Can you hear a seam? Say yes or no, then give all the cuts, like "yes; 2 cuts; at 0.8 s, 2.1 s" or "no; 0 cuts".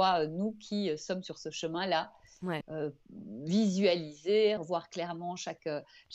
yes; 2 cuts; at 2.6 s, 4.6 s